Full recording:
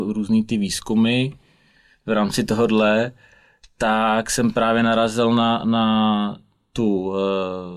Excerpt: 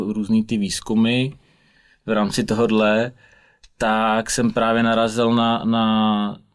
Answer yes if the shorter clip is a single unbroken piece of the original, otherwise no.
yes